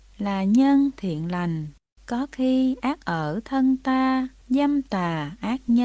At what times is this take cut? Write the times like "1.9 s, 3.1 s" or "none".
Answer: 2.0 s, 4.4 s